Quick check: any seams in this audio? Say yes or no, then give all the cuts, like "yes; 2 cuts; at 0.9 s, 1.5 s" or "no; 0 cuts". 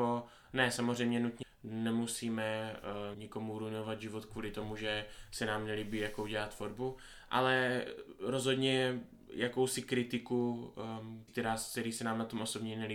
yes; 3 cuts; at 1.4 s, 3.1 s, 11.3 s